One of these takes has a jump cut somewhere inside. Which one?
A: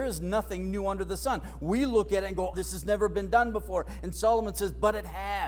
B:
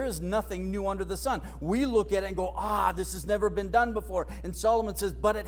A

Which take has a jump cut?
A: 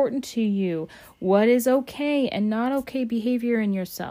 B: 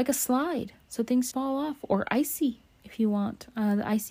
B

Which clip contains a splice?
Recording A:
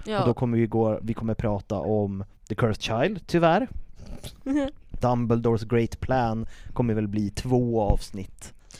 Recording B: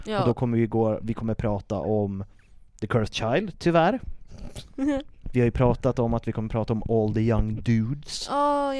A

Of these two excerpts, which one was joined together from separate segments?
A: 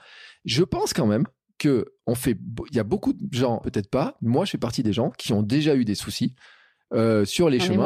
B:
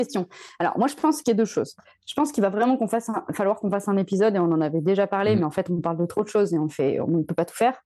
A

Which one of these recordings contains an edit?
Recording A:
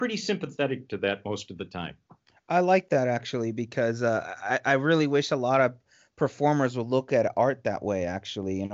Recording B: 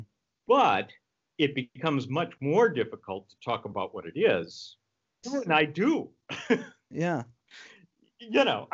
B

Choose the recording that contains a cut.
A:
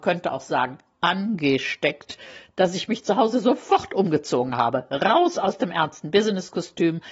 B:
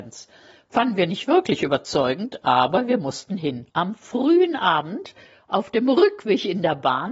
B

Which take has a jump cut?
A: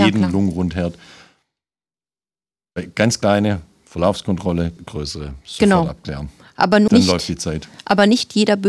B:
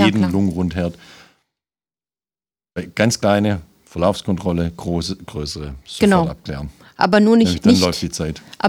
A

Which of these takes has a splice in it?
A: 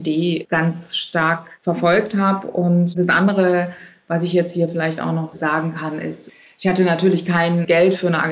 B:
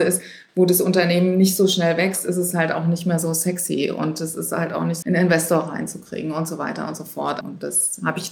B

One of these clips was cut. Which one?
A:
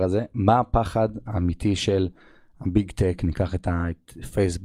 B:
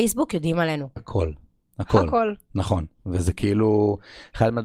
B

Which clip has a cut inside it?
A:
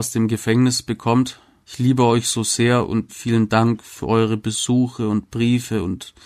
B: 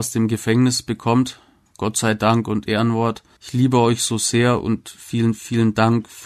A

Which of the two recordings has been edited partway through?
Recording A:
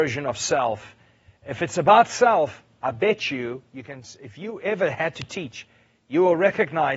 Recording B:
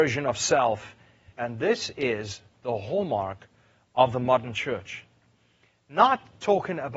B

